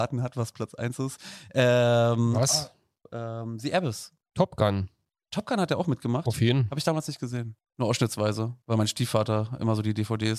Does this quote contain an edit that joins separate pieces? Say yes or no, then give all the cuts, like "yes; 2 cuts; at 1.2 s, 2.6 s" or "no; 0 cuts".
no; 0 cuts